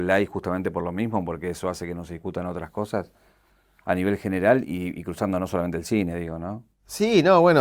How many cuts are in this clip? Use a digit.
0